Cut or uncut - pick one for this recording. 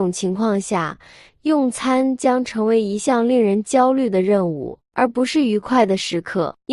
uncut